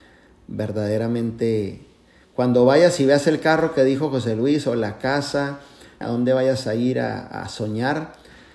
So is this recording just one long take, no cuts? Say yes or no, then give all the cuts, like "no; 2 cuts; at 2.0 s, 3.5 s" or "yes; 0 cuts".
no; 1 cut; at 6.0 s